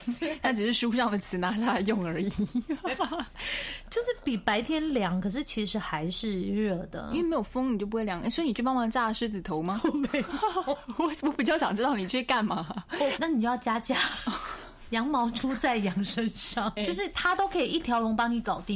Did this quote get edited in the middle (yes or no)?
yes